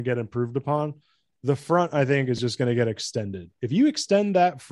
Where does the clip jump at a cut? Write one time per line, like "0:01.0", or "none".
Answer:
none

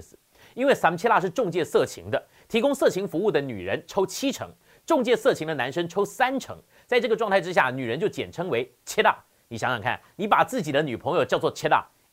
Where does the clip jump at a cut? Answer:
none

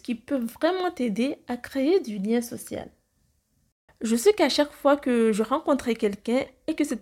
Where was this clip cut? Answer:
0:03.9

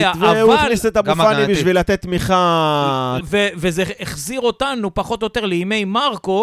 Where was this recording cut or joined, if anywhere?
0:03.2

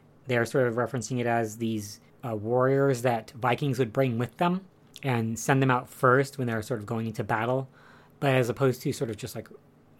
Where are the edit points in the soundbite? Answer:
none

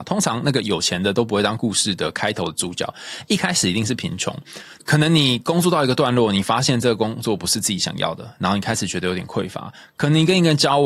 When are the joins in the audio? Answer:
0:04.8

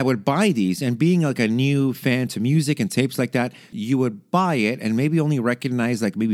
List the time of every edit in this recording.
0:03.7

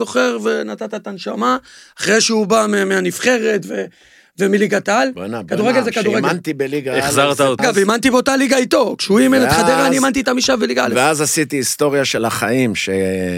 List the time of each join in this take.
0:07.6

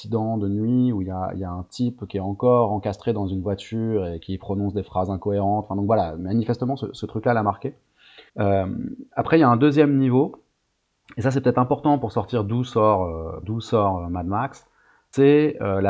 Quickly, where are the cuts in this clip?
0:08.3
0:13.4

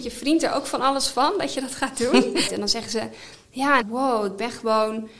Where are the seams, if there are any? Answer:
0:02.5
0:03.8

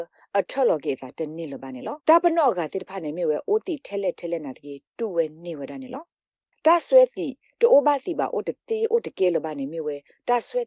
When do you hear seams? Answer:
0:02.0

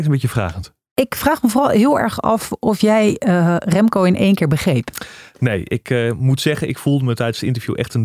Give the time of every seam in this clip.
none

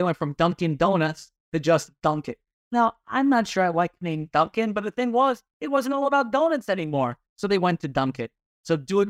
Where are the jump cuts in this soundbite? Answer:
none

